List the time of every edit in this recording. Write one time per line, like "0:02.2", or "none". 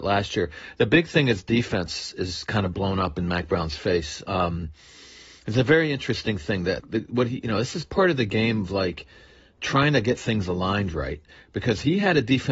0:06.8